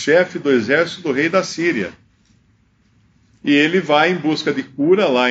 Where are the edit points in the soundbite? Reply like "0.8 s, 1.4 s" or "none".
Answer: none